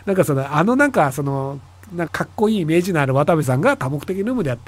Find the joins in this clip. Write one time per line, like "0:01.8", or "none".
0:02.1